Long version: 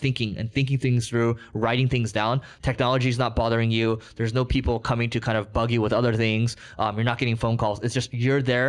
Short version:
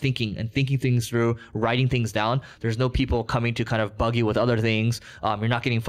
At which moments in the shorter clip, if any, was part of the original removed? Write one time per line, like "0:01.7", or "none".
0:02.6